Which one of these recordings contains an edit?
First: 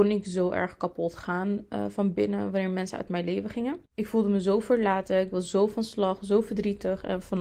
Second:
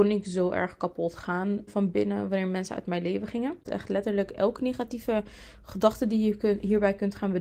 second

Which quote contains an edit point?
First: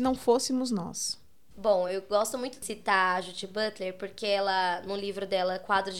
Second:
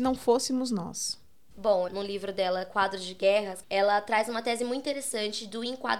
second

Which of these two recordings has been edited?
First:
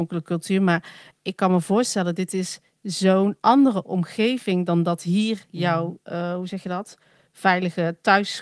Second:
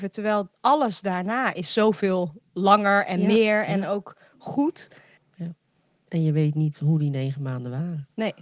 second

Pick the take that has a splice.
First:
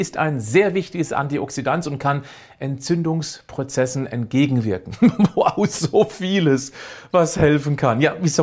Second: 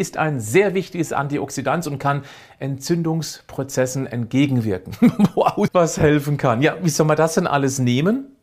second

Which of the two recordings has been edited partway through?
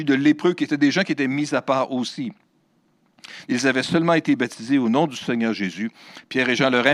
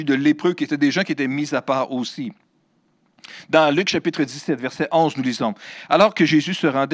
first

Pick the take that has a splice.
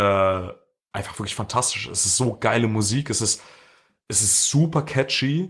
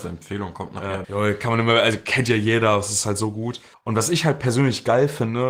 second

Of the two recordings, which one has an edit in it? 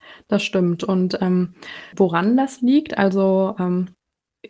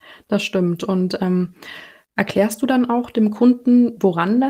first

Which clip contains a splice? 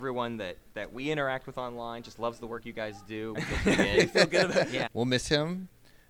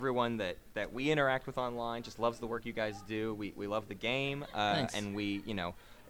first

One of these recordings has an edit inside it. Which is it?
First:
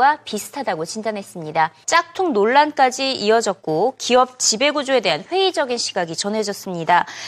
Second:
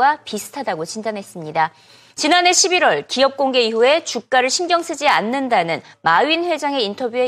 first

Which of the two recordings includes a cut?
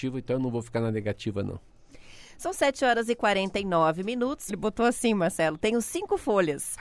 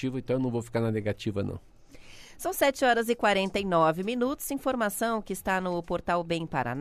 first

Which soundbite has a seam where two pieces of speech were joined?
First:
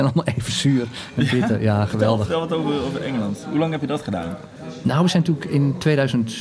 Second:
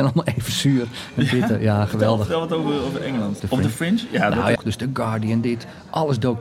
second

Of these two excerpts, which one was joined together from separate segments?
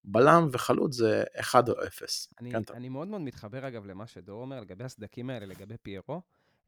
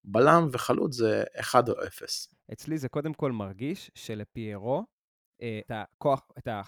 second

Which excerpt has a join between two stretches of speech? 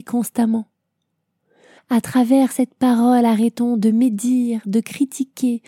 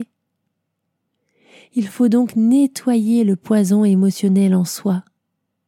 first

